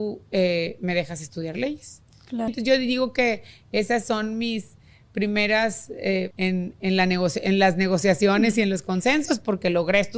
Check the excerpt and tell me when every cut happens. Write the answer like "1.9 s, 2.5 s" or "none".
2.5 s, 6.3 s